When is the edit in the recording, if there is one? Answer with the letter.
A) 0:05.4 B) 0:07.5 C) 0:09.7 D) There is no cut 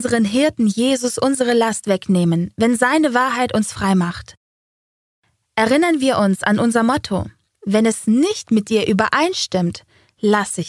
B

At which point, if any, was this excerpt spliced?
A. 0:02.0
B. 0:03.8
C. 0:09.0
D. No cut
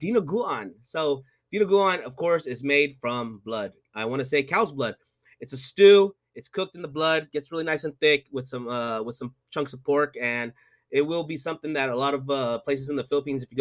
D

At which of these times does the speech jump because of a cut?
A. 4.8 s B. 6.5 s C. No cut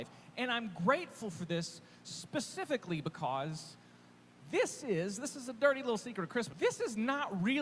B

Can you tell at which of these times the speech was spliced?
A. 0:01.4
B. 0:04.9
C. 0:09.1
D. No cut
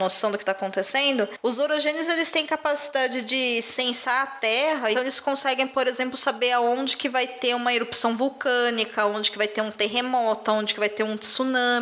B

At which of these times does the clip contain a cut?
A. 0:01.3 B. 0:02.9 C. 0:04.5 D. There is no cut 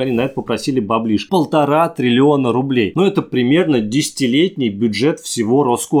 A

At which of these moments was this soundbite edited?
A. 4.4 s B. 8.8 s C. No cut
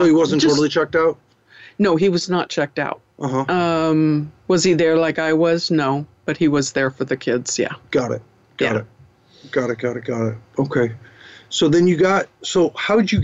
A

